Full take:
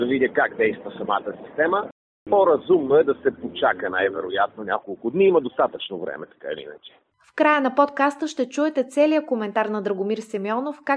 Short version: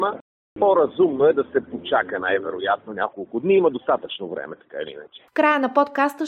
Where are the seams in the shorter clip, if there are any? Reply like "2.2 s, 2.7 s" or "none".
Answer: 5.3 s